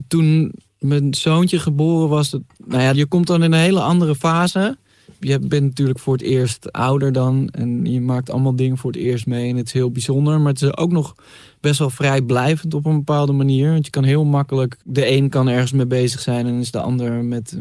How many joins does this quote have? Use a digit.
1